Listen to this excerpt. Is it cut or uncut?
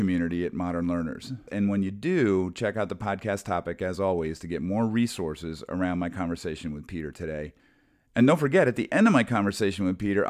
cut